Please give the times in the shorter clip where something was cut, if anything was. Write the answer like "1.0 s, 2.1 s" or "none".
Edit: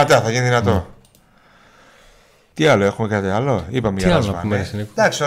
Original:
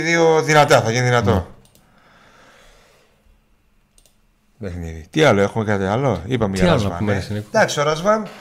2.5 s